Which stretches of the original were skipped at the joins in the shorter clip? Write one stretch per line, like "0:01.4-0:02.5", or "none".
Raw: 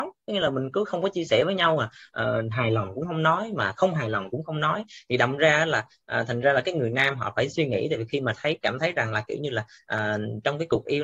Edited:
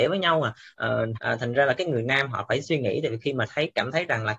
0:02.5-0:06.0